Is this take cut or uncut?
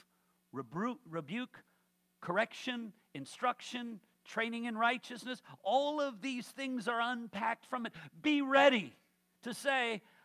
uncut